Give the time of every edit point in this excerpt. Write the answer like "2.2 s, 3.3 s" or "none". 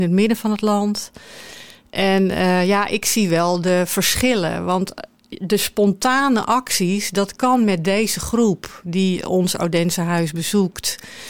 none